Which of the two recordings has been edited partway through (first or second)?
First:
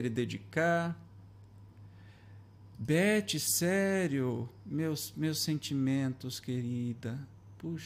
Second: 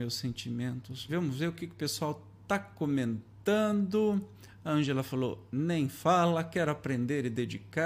second